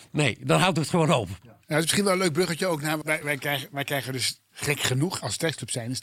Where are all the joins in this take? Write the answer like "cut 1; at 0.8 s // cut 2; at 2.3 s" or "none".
cut 1; at 3.0 s // cut 2; at 4.5 s